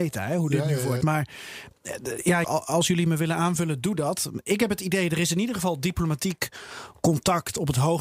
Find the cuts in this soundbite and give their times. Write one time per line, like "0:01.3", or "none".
0:01.0
0:02.4